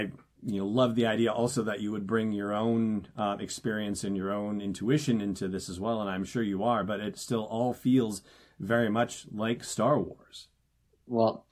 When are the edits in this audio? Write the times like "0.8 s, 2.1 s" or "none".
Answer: none